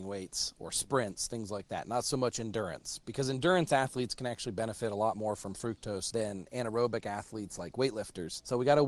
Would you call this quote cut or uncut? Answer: uncut